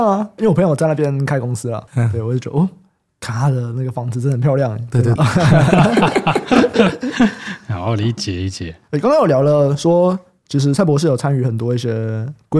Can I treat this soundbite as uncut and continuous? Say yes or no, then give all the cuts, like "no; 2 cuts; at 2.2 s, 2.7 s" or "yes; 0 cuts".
no; 1 cut; at 5.2 s